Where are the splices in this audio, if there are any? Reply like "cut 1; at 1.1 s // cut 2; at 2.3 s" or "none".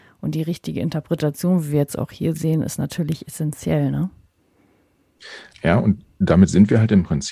none